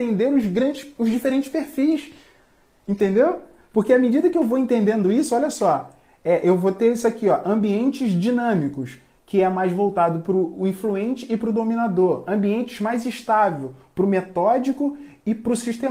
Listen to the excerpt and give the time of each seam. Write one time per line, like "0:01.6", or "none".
none